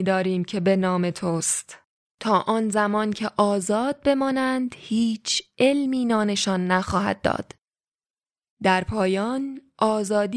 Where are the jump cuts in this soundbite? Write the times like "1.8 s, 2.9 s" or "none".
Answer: 2.1 s